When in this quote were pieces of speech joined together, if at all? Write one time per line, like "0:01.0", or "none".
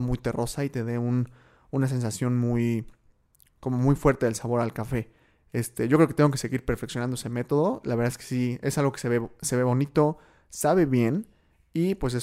none